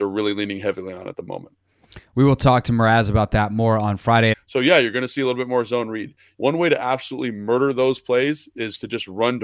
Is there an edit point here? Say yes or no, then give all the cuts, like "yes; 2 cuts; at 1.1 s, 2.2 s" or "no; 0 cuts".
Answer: yes; 2 cuts; at 4.3 s, 6.3 s